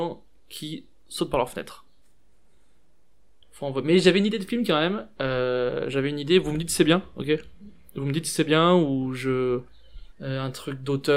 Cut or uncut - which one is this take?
cut